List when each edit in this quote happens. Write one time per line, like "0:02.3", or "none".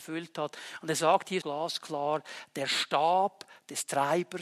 0:01.4